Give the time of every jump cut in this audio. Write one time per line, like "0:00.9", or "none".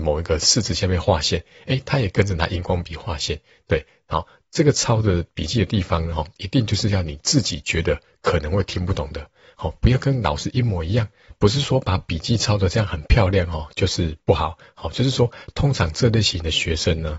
none